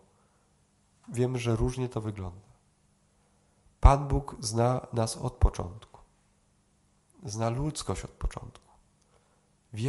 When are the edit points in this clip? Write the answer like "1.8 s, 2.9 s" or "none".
none